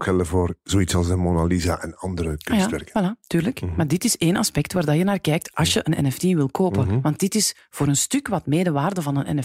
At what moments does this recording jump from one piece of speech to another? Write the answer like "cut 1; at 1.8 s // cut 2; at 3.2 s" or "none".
none